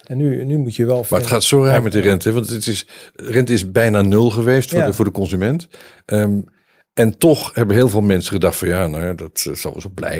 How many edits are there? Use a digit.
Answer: 0